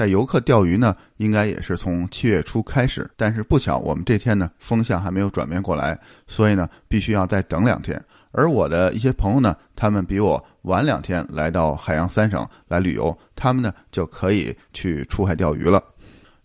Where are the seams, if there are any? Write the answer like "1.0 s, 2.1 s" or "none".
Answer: 3.1 s

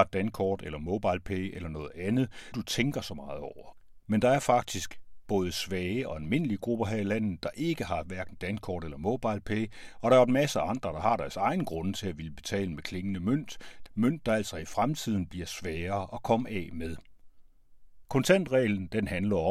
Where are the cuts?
2.5 s, 13.9 s, 18.0 s

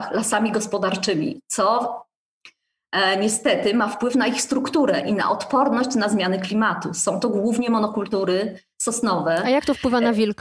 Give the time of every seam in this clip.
none

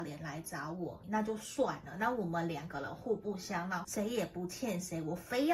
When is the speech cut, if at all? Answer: 1.0 s, 3.8 s

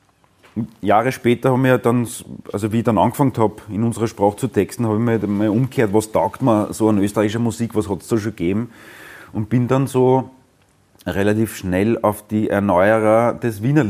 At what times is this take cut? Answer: none

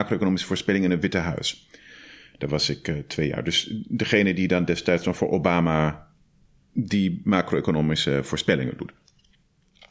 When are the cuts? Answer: none

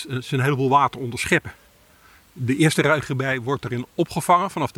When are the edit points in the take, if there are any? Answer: 2.1 s

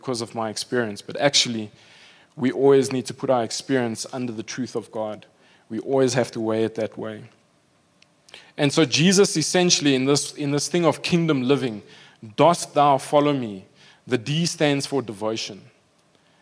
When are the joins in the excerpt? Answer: none

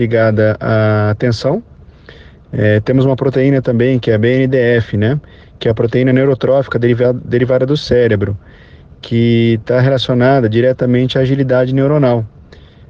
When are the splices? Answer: none

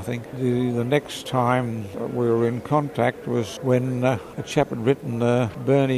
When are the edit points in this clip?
3.6 s

